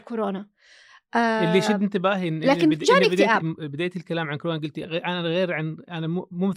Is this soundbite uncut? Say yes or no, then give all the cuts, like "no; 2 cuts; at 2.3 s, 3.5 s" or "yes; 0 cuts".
no; 2 cuts; at 3.4 s, 4.8 s